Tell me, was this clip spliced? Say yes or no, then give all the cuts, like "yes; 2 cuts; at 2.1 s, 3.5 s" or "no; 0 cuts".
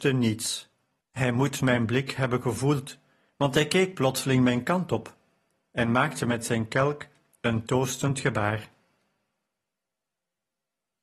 yes; 1 cut; at 1.0 s